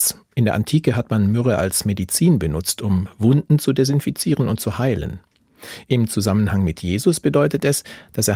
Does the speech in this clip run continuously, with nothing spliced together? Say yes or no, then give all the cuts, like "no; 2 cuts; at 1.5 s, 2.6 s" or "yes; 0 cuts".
yes; 0 cuts